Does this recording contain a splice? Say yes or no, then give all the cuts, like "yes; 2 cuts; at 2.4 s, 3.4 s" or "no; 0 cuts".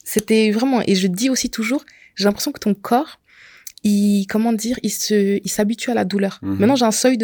no; 0 cuts